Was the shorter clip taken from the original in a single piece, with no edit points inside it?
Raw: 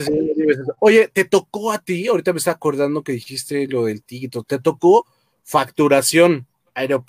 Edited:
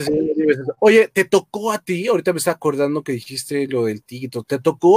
yes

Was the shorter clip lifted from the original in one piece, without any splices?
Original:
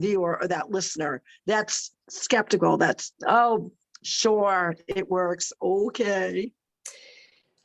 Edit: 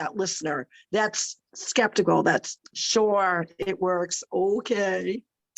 no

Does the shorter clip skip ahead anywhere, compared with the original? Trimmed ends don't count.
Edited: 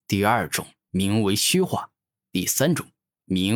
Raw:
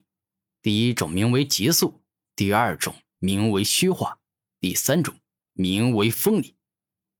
no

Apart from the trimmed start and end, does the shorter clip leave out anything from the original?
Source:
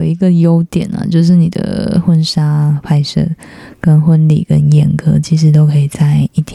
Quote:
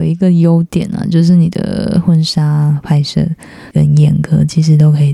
yes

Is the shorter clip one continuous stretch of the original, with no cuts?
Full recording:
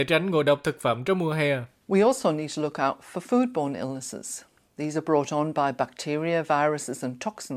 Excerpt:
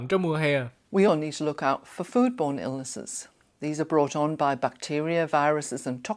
no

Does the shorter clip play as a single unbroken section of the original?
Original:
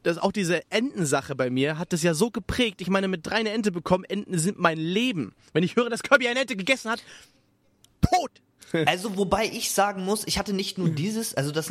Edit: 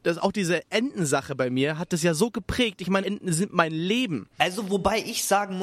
no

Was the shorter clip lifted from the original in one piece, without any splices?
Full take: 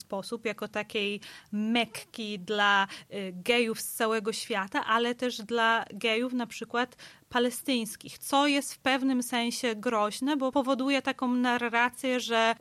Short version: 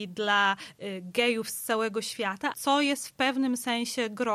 no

